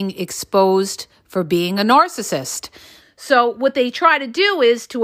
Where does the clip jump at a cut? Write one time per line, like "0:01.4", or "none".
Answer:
0:03.0